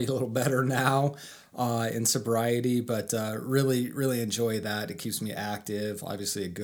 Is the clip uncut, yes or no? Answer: yes